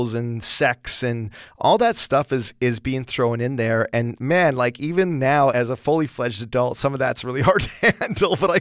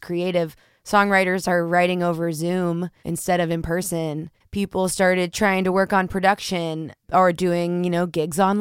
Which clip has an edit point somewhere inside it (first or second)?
second